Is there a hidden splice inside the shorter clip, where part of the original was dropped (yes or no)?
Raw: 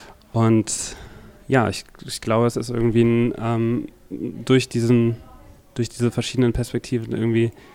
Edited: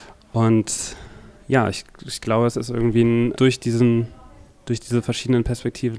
yes